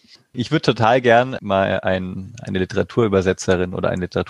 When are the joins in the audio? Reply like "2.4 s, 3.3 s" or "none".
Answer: 1.4 s